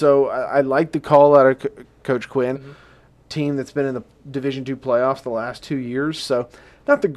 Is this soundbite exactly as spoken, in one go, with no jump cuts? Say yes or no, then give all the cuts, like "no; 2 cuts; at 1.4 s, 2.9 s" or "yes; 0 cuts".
no; 2 cuts; at 2.5 s, 6.2 s